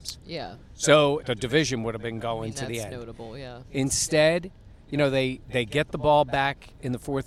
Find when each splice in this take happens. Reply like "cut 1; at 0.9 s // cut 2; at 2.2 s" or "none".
cut 1; at 1.2 s